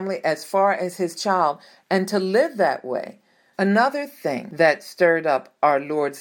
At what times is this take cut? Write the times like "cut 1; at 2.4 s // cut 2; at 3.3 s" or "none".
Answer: cut 1; at 3.5 s